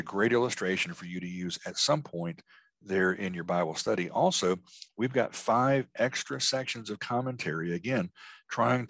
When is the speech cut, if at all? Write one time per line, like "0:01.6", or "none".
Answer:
none